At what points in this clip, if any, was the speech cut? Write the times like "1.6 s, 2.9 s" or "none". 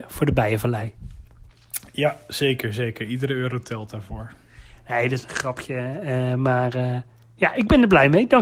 none